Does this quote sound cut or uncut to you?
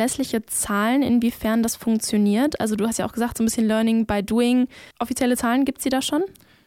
cut